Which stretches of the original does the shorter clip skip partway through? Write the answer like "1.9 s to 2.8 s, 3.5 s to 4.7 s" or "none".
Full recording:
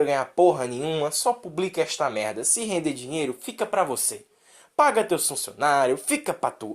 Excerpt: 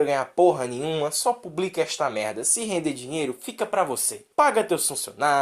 4.3 s to 4.7 s